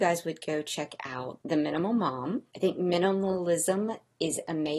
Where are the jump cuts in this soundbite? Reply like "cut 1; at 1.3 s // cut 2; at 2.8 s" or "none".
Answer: cut 1; at 2.5 s